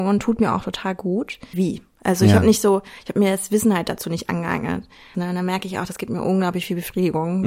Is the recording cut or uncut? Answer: cut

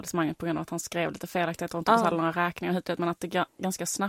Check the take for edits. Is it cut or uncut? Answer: uncut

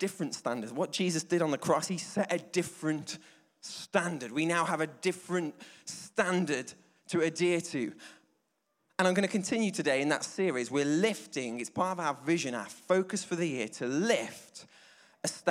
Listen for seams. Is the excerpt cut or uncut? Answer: uncut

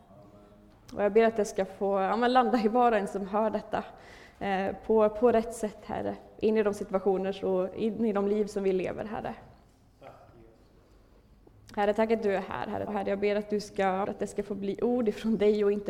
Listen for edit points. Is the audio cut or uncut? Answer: cut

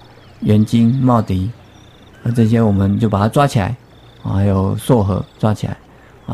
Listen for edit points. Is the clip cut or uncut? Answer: cut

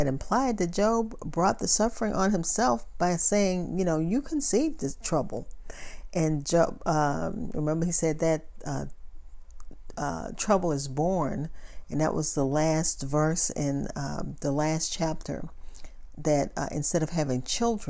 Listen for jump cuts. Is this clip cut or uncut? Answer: uncut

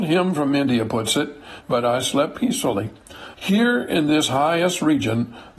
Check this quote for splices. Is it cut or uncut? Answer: cut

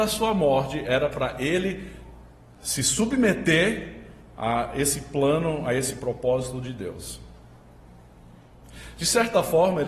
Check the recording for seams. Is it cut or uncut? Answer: uncut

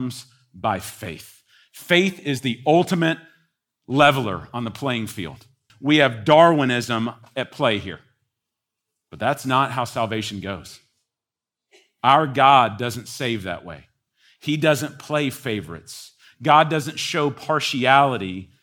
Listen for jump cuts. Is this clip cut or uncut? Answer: cut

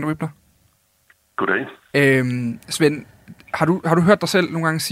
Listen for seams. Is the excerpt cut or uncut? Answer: cut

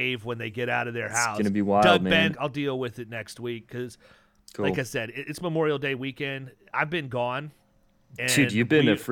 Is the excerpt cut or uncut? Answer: cut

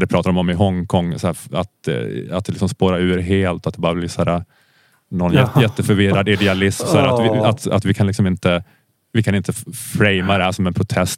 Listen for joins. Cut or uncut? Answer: uncut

